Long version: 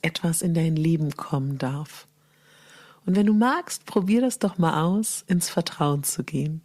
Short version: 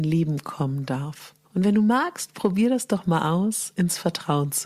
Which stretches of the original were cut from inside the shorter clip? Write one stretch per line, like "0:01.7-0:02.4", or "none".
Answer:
0:02.2-0:03.0